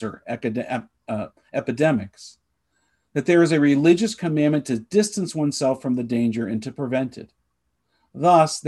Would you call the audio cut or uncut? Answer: uncut